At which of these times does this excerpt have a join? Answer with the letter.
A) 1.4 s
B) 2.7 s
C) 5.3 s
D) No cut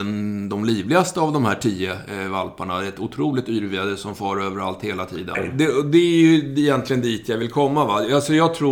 C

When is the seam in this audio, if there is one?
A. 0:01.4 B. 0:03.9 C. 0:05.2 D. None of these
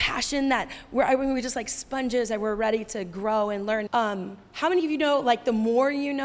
B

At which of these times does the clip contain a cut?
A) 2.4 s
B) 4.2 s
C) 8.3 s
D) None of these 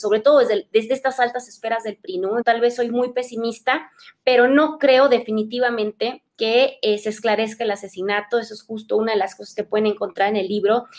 A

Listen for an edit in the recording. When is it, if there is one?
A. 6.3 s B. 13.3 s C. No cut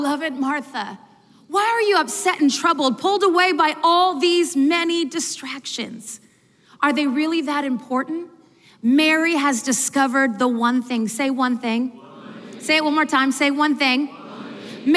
C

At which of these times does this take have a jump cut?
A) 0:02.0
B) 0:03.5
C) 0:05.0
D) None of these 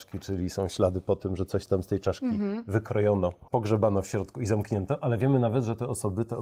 B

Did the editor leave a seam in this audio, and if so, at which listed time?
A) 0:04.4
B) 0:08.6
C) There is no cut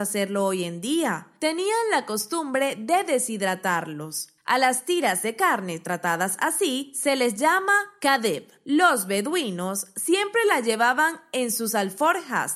C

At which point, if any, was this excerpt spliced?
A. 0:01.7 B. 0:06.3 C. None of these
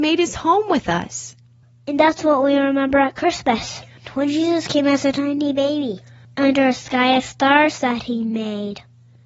B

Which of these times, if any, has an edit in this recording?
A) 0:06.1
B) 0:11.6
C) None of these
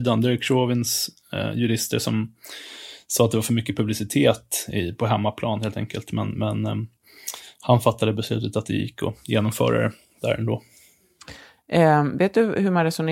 B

